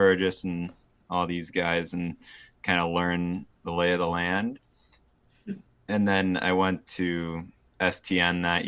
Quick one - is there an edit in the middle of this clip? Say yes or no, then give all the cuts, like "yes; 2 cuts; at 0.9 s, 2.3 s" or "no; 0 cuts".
no; 0 cuts